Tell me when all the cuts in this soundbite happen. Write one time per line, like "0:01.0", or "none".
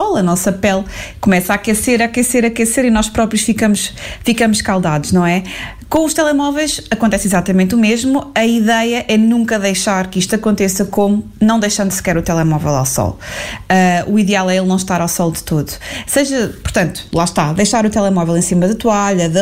none